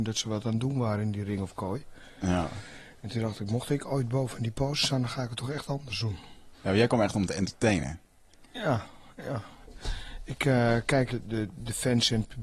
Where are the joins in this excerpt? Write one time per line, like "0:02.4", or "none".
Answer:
0:06.5
0:11.1